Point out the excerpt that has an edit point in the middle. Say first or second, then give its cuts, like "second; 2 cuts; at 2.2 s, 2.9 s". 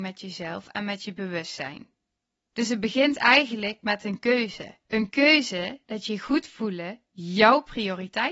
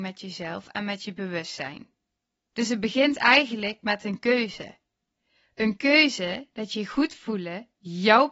first; 1 cut; at 4.8 s